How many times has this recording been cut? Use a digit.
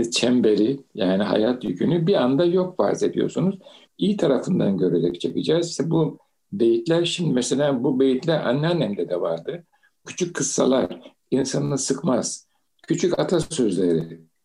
2